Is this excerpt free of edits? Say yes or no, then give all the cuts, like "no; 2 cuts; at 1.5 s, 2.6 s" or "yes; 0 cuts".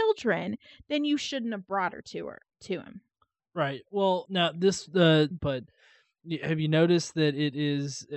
no; 2 cuts; at 4.2 s, 5.3 s